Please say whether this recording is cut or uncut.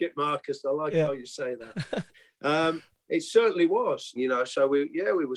cut